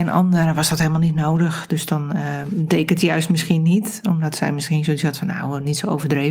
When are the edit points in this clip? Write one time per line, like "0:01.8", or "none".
none